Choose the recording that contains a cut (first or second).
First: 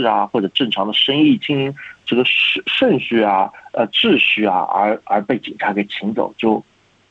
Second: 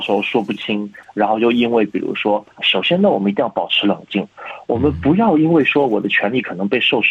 second